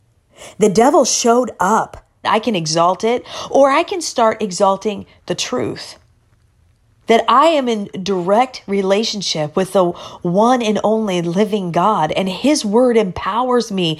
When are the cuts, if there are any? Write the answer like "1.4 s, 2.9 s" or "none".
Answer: 2.2 s